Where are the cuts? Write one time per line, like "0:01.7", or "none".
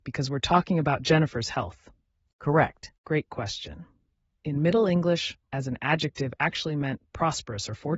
0:02.9
0:05.5